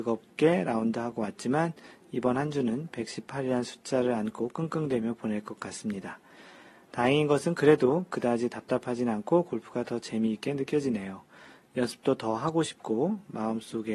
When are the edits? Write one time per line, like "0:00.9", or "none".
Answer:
none